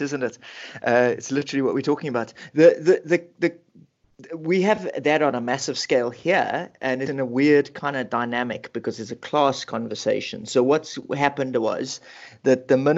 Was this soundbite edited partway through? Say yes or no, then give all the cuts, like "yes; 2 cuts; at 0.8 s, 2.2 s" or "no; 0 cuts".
no; 0 cuts